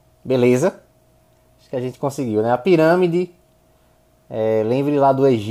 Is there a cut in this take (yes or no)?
no